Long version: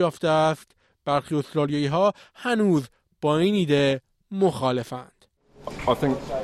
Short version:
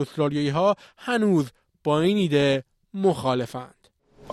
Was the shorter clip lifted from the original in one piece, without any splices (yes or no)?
yes